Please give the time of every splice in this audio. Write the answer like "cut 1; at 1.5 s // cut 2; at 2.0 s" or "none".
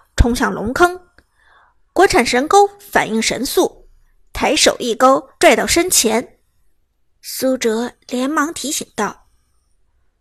cut 1; at 5.4 s // cut 2; at 7.1 s